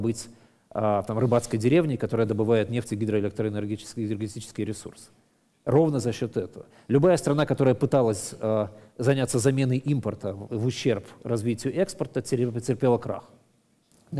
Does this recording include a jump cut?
no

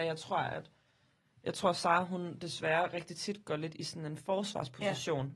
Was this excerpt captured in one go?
yes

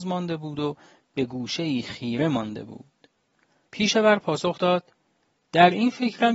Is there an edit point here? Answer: yes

